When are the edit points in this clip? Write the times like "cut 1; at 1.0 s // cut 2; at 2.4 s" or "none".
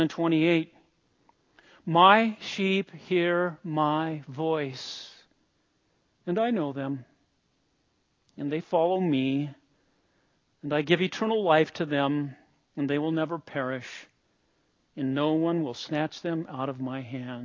none

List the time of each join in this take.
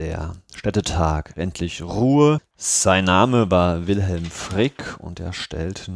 cut 1; at 2.5 s

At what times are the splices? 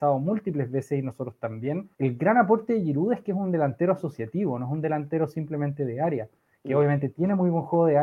cut 1; at 1.9 s

